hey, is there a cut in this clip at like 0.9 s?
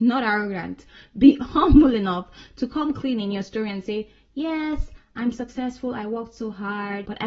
no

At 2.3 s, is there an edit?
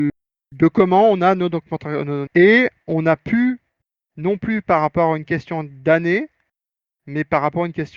yes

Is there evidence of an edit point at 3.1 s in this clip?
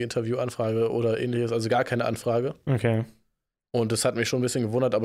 no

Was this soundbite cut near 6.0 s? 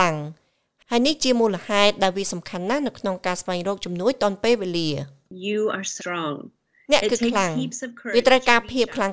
yes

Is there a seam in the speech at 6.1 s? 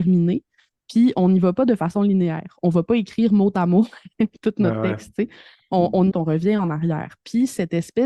yes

